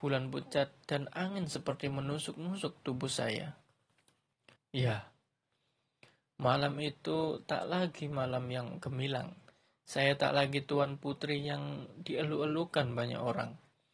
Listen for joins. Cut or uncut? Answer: cut